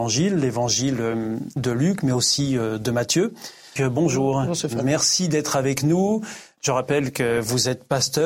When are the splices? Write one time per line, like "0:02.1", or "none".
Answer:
0:03.8